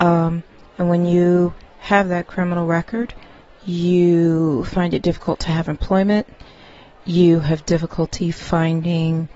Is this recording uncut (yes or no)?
no